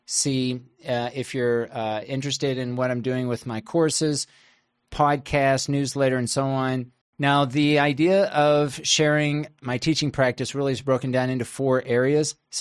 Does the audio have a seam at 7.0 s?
yes; 1 cut; at 7.0 s

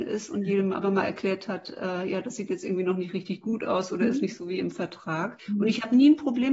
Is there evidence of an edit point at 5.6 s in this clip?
no; 0 cuts

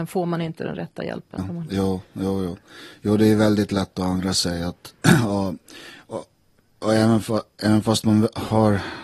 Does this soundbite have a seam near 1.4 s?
yes; 1 cut; at 1.4 s

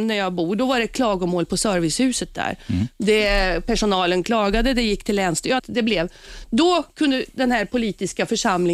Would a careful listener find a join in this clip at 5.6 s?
yes; 1 cut; at 5.6 s

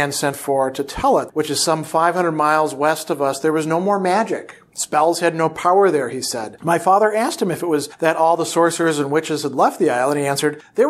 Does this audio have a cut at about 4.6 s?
no; 2 cuts; at 1.3 s, 6.6 s

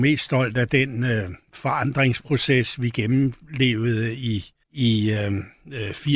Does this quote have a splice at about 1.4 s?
no; 1 cut; at 4.6 s

